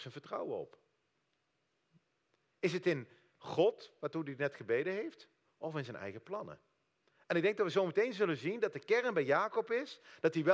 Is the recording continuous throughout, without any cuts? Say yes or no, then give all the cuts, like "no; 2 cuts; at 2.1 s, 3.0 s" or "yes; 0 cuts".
yes; 0 cuts